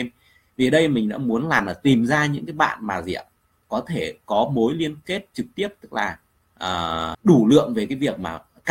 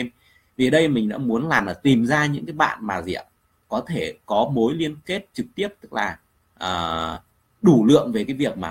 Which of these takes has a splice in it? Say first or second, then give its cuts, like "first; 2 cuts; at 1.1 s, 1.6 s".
first; 1 cut; at 7.1 s